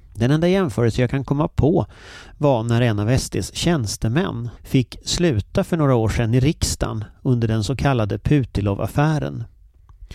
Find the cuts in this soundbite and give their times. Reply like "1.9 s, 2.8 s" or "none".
4.6 s